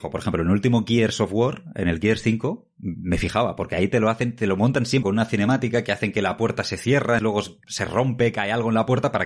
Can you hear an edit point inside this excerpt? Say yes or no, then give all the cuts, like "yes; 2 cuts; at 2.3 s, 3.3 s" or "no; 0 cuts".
yes; 2 cuts; at 5.0 s, 7.2 s